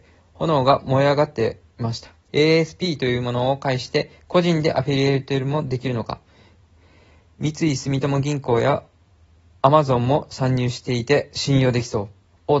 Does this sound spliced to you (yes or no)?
yes